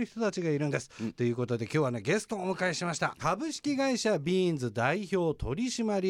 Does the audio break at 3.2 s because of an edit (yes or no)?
yes